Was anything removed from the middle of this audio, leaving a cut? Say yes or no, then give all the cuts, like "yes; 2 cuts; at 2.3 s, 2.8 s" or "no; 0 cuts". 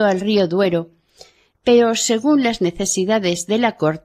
no; 0 cuts